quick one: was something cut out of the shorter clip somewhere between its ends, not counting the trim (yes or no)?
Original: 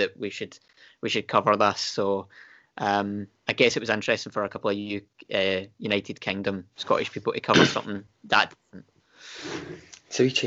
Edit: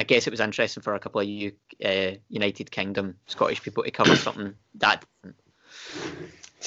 no